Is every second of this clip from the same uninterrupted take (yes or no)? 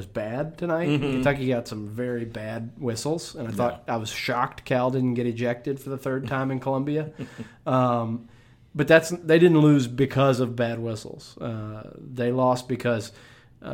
yes